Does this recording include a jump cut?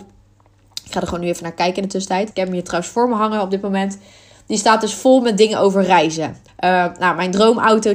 yes; 2 cuts; at 2.3 s, 6.5 s

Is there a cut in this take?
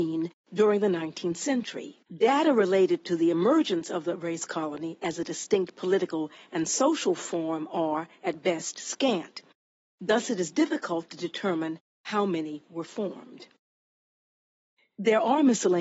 yes; 1 cut; at 2.1 s

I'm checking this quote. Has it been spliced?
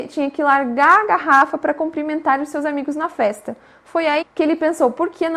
yes; 1 cut; at 4.2 s

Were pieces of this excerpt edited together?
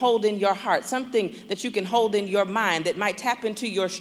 no; 0 cuts

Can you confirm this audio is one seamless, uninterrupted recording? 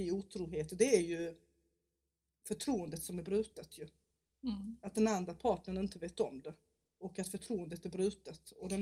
yes; 0 cuts

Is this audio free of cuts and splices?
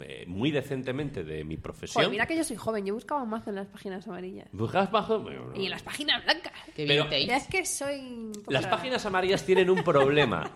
yes; 0 cuts

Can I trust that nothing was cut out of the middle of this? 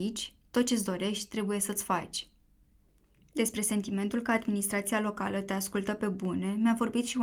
yes; 0 cuts

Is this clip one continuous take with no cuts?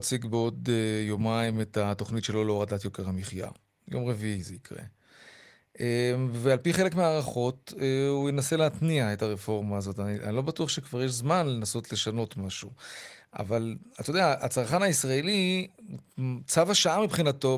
yes; 0 cuts

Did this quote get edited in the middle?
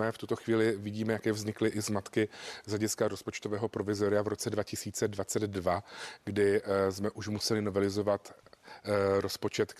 no; 0 cuts

